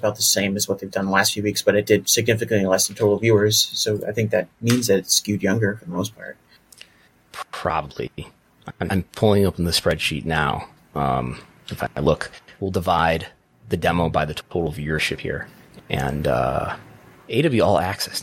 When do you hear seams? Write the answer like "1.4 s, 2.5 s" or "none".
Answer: none